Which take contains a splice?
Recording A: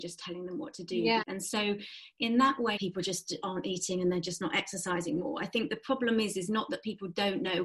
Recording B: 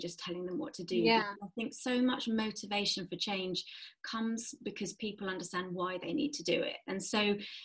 A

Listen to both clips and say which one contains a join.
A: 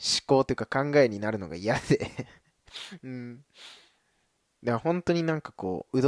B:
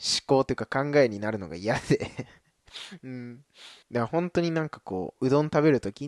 B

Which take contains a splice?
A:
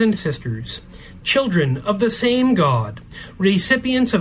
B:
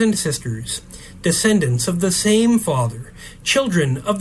A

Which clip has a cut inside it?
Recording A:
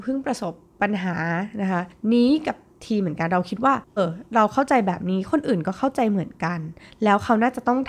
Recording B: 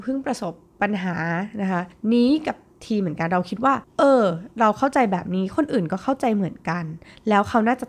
A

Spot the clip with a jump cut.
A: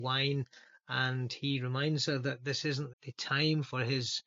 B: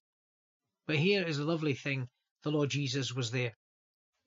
A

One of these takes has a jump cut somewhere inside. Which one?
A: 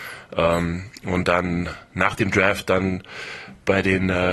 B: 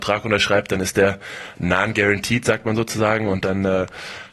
A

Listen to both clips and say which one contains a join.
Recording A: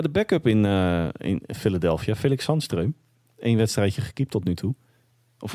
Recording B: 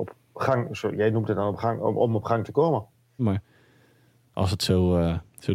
B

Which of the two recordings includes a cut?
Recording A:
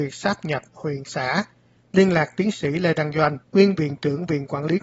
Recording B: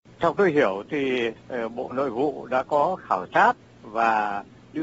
A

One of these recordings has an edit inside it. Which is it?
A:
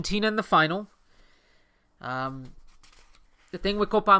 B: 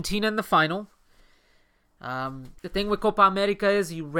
B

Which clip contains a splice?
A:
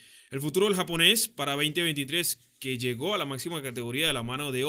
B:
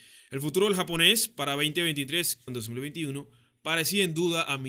B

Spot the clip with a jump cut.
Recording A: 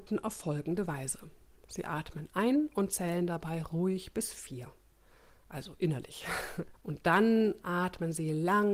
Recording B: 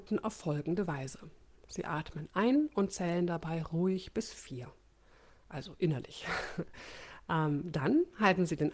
A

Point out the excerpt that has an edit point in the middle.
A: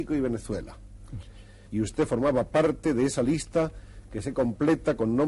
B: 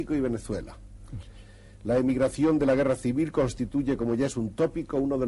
A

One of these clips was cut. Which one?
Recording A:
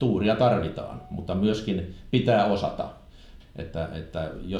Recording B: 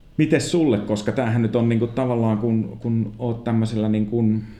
A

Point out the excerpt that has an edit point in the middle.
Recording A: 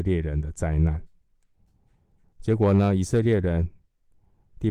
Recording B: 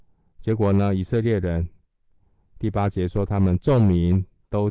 A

